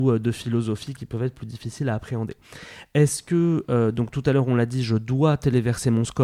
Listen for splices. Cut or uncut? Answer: uncut